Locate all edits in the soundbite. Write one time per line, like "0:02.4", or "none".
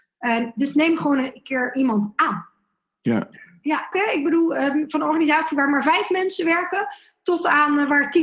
0:03.9